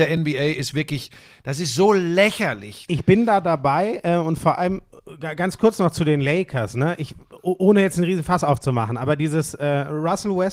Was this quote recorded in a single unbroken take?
no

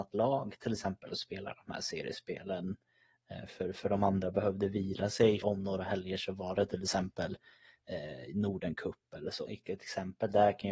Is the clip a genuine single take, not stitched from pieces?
no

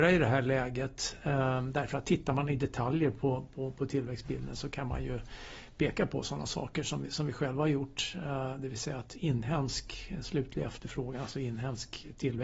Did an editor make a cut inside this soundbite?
no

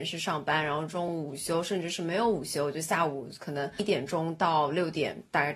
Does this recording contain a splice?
no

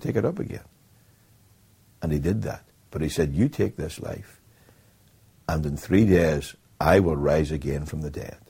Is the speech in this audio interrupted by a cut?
no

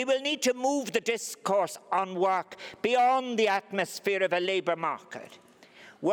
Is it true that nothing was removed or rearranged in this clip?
yes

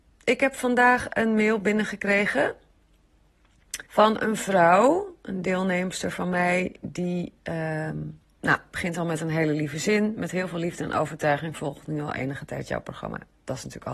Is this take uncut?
no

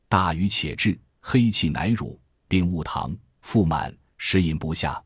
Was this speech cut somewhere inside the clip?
no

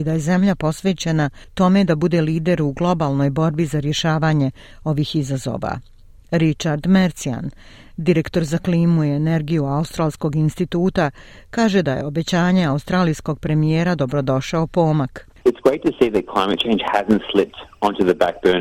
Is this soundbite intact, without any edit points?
yes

